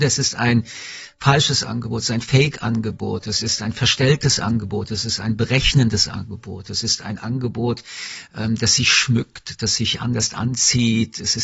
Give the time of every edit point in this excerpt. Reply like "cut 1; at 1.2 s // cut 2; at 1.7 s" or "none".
none